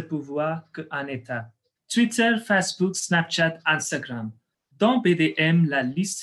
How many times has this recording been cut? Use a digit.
1